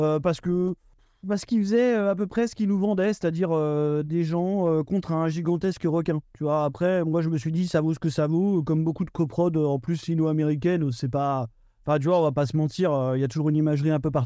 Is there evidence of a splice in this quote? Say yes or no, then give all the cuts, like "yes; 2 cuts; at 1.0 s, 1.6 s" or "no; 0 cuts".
no; 0 cuts